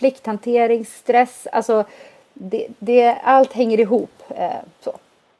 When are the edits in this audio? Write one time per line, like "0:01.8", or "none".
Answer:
none